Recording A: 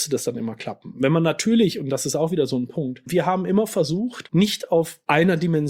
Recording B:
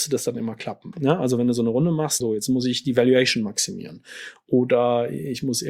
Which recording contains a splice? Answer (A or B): B